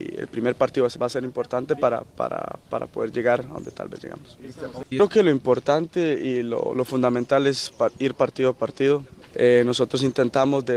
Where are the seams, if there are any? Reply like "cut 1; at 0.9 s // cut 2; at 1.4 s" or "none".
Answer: cut 1; at 1.0 s // cut 2; at 4.9 s // cut 3; at 9.2 s